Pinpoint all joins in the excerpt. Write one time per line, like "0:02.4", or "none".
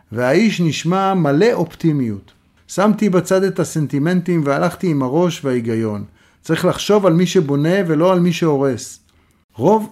0:02.6